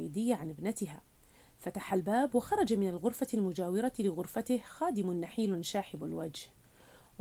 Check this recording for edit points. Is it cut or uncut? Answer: uncut